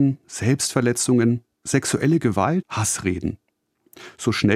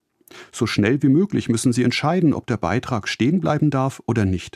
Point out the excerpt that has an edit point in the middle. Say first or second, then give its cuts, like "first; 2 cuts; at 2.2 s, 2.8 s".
first; 1 cut; at 2.6 s